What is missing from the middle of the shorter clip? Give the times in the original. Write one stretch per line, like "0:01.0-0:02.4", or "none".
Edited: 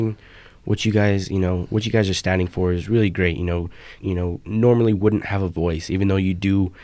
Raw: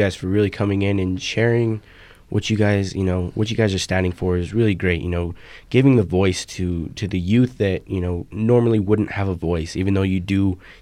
0:05.6-0:07.8